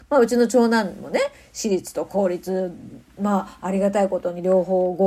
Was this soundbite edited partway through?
no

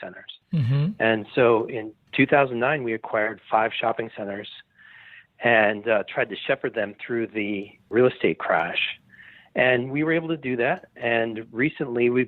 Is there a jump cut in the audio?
no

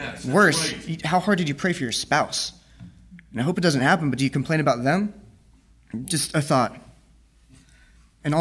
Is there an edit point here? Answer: no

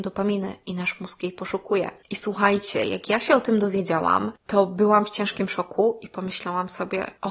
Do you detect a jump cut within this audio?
no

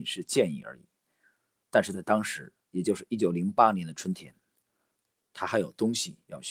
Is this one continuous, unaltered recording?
yes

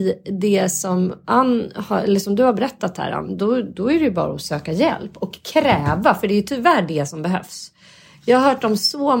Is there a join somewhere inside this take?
no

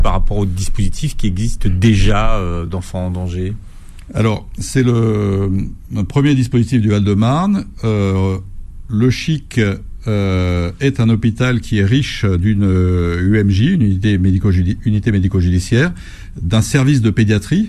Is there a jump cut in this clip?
no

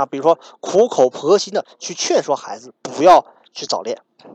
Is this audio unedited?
yes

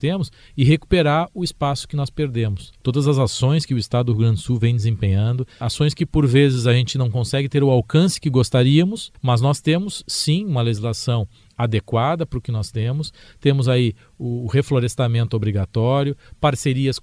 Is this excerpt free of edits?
yes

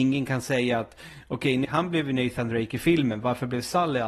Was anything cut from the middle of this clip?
yes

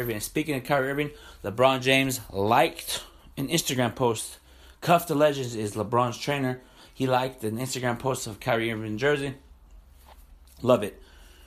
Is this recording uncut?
yes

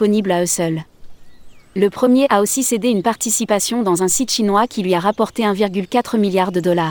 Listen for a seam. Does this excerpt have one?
no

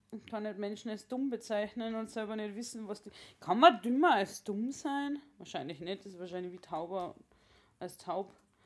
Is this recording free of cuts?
yes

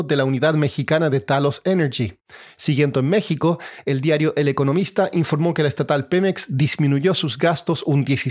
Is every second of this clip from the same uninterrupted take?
yes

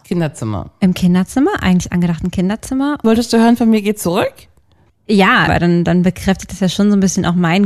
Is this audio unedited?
no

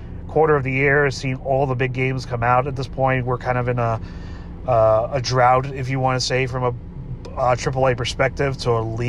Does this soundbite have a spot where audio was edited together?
no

